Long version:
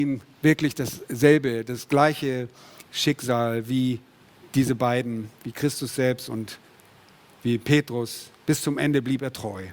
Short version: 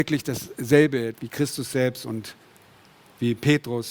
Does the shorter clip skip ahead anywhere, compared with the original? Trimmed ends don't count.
yes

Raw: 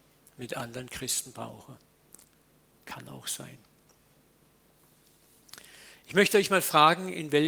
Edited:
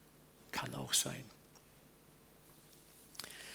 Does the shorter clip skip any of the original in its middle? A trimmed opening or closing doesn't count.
no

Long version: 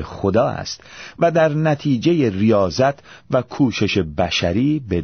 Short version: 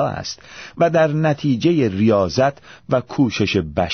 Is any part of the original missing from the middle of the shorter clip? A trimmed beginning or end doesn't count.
no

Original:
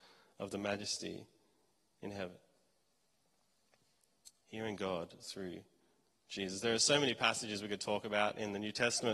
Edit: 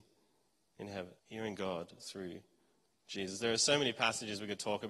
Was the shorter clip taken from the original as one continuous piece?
no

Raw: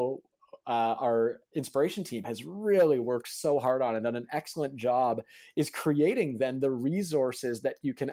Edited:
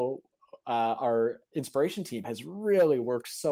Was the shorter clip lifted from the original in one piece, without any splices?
yes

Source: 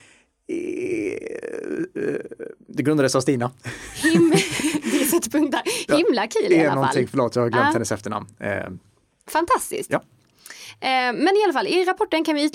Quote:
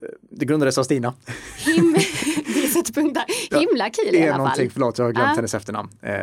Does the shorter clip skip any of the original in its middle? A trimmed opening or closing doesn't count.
no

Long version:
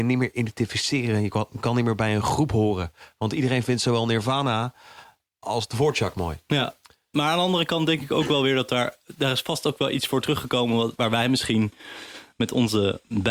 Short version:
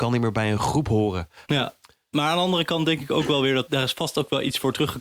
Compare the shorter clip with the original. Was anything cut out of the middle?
yes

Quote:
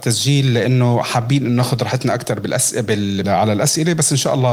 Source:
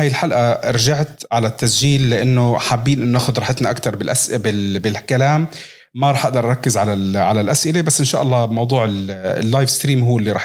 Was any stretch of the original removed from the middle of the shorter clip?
yes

